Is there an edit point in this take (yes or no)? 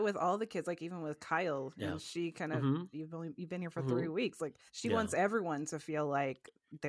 yes